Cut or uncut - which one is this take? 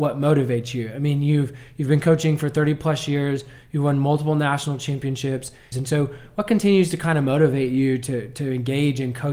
cut